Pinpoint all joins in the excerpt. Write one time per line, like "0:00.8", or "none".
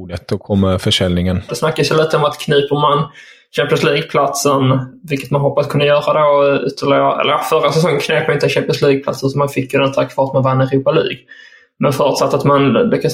0:01.5